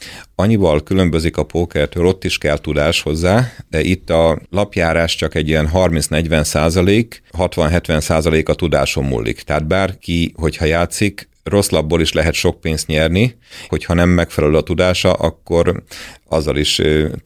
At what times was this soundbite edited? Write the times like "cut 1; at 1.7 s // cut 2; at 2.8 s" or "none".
cut 1; at 13.7 s